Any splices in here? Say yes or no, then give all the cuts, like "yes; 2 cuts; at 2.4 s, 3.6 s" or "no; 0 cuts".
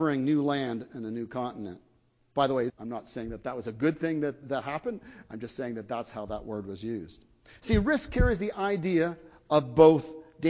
yes; 2 cuts; at 2.7 s, 4.4 s